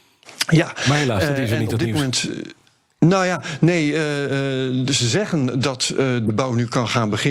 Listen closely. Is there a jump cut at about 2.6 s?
no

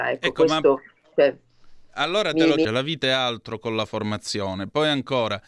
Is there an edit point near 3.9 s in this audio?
no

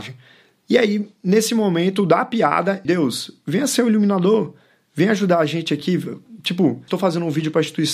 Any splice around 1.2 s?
no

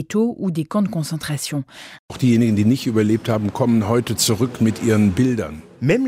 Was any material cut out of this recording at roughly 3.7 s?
no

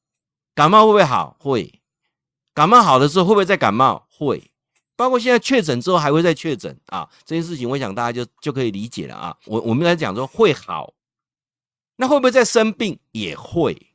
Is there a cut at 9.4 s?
yes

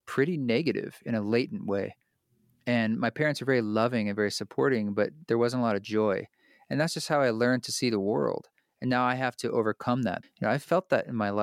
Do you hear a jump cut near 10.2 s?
yes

